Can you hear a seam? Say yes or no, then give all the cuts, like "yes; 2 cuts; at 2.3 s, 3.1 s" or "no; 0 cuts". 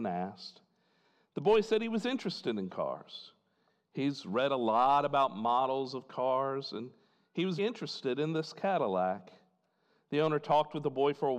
yes; 1 cut; at 7.6 s